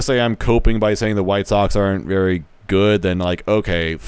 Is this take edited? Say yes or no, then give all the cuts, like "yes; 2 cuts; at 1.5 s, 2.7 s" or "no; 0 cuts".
no; 0 cuts